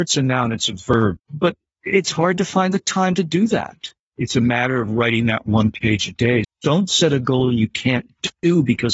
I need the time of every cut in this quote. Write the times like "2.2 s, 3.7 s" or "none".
1.2 s, 4.0 s, 6.4 s